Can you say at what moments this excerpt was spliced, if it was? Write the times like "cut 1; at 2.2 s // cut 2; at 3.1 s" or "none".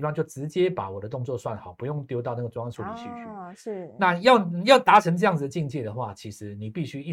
none